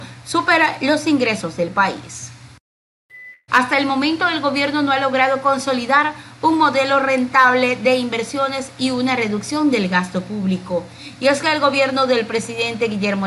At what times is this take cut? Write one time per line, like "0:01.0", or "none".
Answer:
0:03.5